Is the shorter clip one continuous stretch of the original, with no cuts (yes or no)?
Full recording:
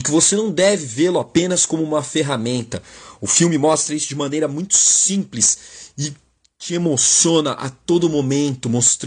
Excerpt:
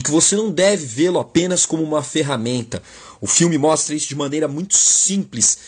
yes